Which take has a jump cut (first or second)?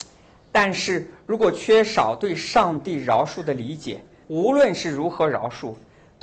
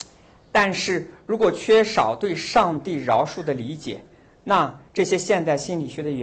first